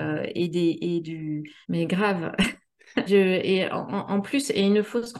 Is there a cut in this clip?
yes; 2 cuts; at 1.6 s, 3.1 s

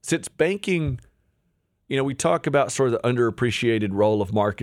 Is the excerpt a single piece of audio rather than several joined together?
yes; 0 cuts

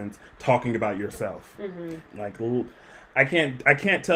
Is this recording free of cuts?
no; 1 cut; at 2.0 s

